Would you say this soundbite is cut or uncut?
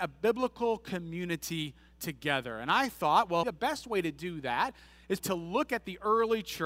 cut